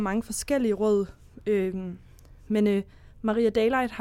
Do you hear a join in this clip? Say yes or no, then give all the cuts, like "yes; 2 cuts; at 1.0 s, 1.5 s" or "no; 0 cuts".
no; 0 cuts